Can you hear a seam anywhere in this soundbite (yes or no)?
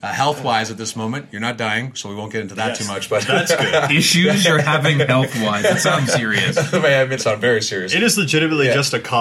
yes